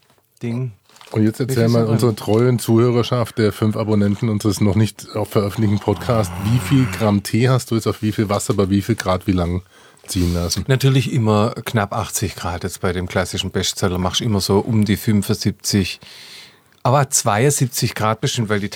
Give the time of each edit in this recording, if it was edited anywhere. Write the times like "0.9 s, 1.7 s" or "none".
none